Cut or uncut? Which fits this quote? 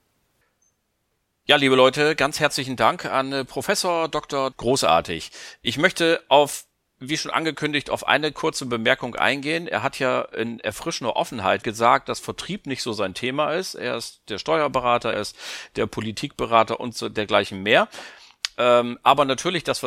cut